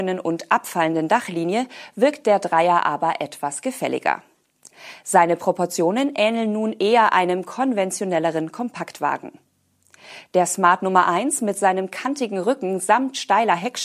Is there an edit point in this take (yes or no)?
no